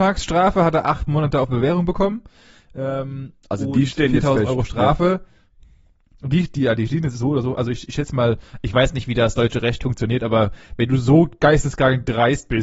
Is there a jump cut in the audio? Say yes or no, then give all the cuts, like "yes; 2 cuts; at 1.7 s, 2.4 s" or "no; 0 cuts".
no; 0 cuts